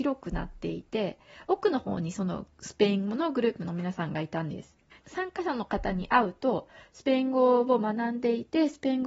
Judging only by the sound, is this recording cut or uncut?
cut